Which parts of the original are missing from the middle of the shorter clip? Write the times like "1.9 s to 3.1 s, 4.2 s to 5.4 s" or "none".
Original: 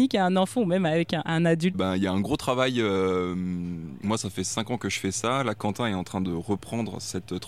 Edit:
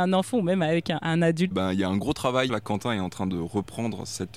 2.7 s to 5.4 s